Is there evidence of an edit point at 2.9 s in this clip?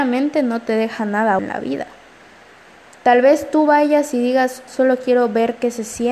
no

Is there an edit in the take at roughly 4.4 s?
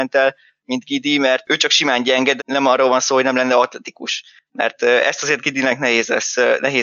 no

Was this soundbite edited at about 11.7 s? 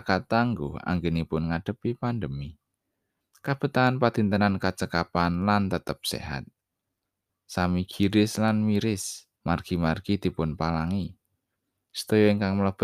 no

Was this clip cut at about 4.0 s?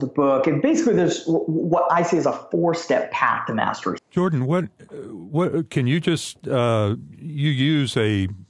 yes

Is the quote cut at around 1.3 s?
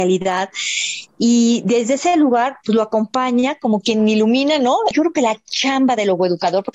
no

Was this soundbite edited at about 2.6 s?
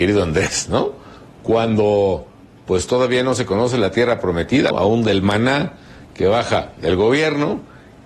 no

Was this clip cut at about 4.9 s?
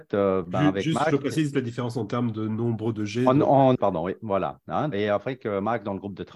yes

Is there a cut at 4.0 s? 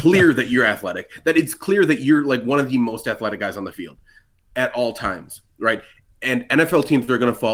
no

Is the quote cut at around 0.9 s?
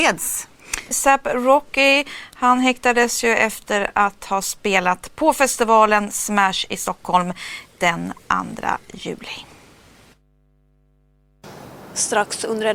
yes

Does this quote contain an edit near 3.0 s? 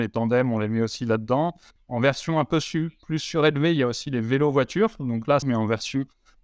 no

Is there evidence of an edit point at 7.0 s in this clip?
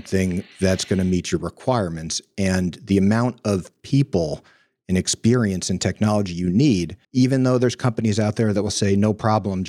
yes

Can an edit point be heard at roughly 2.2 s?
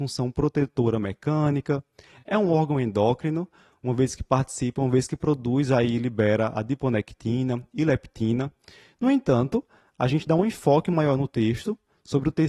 no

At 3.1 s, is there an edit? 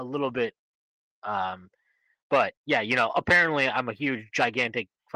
no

